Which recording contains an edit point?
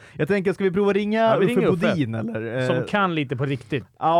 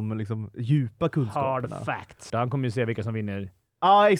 second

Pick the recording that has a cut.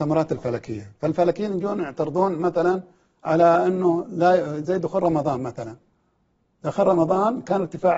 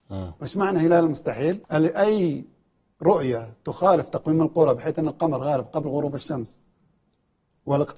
second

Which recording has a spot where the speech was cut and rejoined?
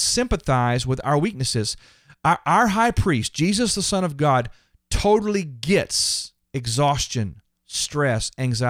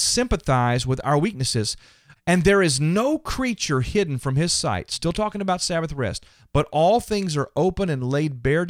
second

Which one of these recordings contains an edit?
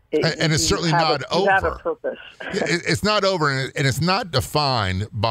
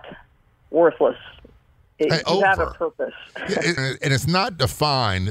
second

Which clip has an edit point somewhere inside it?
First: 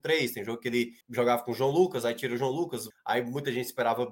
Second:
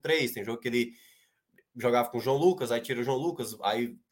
first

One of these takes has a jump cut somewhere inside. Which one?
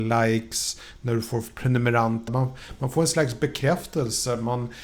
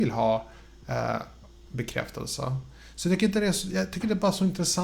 first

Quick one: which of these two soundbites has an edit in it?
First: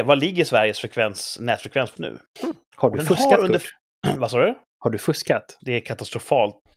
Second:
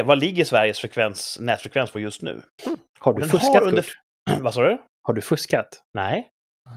first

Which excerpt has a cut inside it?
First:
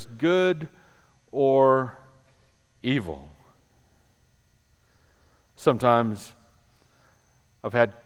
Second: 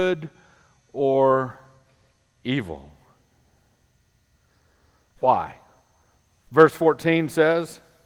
second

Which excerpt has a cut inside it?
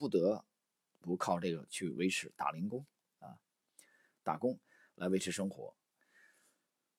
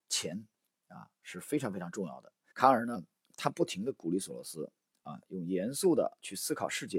second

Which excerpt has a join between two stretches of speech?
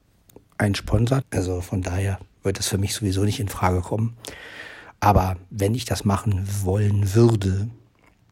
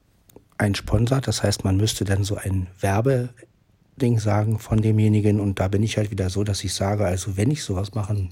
first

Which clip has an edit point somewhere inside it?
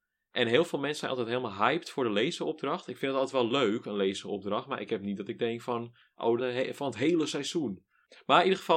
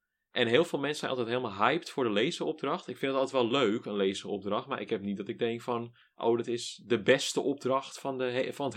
first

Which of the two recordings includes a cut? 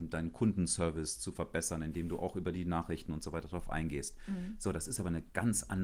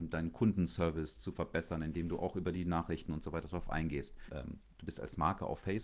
second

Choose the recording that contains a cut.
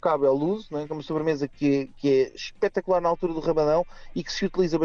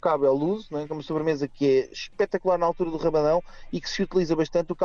second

